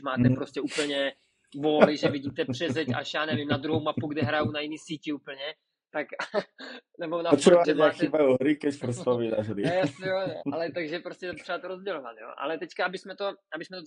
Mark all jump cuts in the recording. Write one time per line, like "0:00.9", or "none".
0:07.6
0:10.4